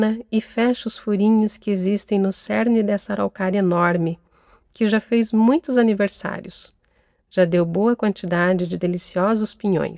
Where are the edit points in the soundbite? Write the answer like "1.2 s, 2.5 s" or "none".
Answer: none

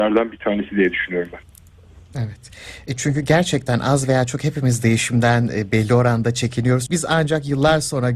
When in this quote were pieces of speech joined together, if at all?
6.9 s

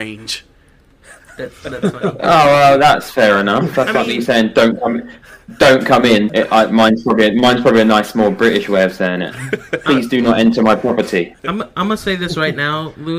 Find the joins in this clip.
6.3 s, 11.4 s

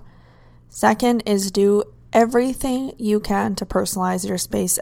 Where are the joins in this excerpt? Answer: none

